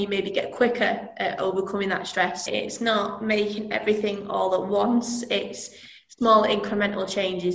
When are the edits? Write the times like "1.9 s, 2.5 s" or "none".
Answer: 2.5 s